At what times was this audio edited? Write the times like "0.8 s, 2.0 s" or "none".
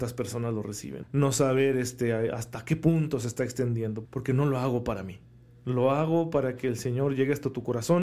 1.0 s, 4.0 s